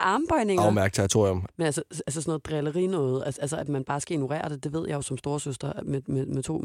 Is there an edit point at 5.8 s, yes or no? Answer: no